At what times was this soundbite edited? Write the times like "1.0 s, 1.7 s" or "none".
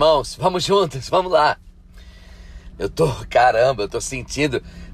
1.1 s, 2.7 s